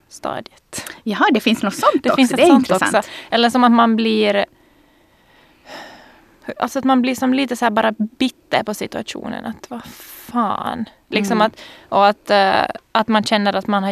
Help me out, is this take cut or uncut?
uncut